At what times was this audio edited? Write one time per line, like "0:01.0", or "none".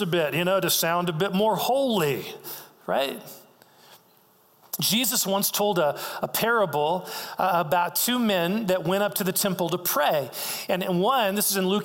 none